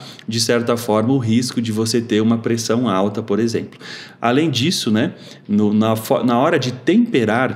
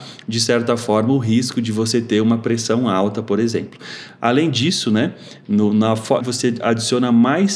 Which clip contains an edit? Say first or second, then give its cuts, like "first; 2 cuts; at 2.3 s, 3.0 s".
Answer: second; 1 cut; at 6.2 s